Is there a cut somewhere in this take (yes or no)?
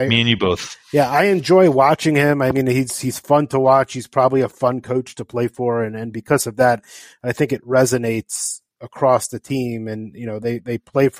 no